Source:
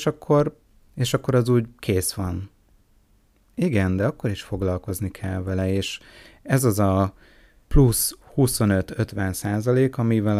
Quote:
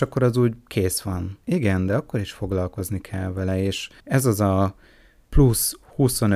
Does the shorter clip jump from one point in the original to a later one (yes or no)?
yes